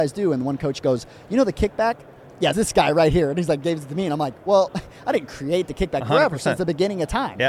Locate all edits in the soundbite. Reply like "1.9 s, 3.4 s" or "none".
2.5 s, 6.0 s